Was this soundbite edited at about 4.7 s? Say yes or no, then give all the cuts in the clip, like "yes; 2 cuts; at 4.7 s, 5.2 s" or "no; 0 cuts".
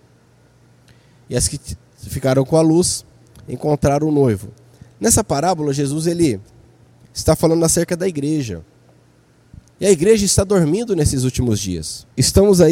no; 1 cut; at 9.7 s